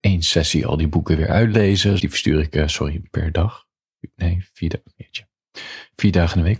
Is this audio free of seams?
no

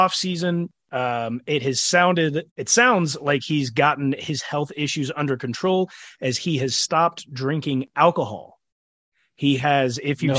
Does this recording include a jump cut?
yes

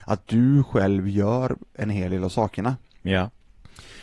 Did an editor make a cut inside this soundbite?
no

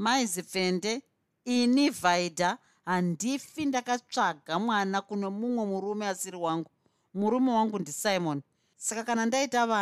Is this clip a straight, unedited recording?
yes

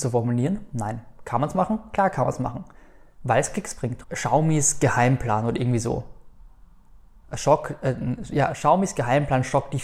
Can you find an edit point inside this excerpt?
yes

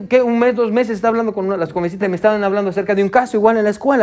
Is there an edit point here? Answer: yes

